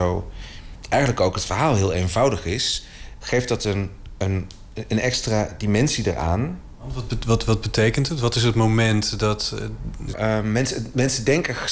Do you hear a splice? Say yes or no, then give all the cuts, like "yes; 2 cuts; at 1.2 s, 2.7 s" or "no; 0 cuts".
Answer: yes; 1 cut; at 10.1 s